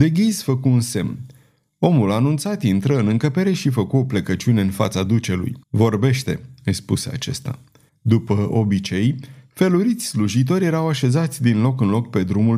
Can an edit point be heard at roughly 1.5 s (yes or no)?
no